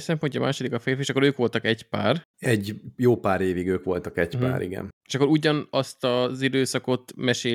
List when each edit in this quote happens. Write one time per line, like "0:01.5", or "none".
none